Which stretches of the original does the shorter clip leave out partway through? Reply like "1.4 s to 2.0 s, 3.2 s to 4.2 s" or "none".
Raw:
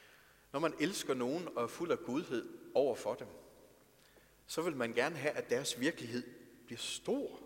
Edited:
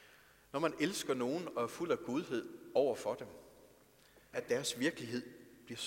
4.3 s to 5.3 s